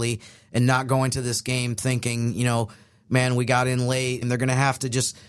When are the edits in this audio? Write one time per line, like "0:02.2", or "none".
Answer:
0:04.2

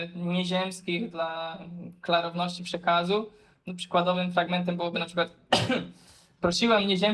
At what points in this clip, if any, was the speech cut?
none

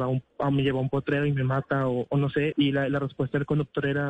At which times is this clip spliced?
0:02.5

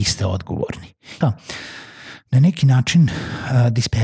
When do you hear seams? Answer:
0:01.2

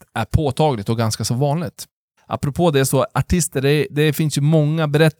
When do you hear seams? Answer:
0:02.2

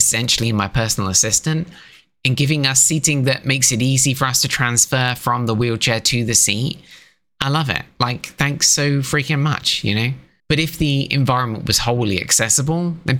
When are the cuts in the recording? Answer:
0:10.4

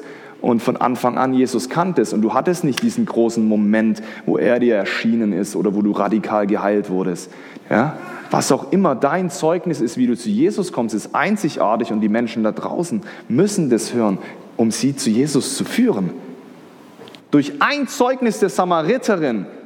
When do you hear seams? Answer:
0:07.6
0:14.5
0:17.2

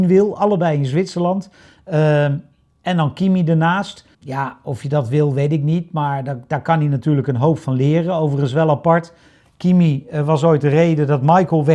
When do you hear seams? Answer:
0:04.1

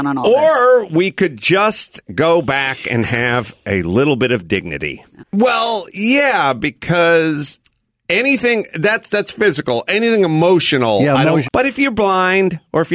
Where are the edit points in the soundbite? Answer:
0:05.2
0:11.5

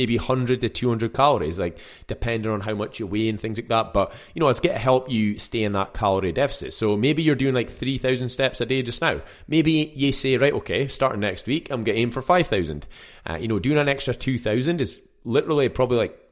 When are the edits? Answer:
none

